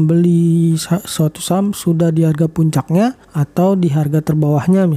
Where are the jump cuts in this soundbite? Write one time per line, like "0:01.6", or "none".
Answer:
0:03.2

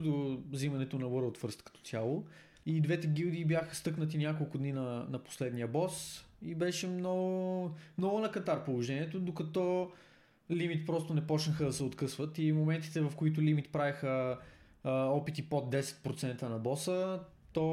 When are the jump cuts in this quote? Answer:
0:02.6

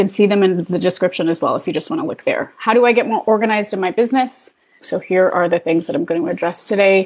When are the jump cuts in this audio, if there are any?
0:04.8

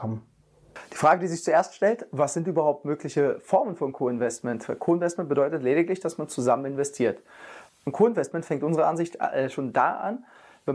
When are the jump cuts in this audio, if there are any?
0:07.7

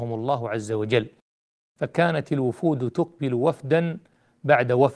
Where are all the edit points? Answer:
none

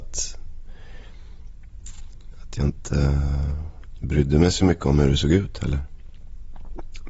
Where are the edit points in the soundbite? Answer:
none

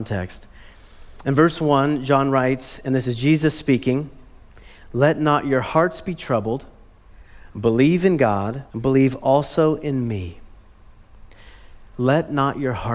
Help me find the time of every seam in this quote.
0:08.7

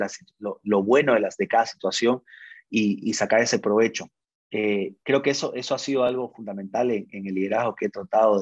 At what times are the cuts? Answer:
0:03.0

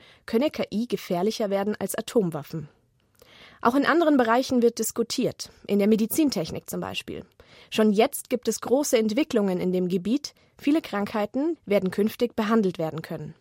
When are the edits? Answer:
0:11.6

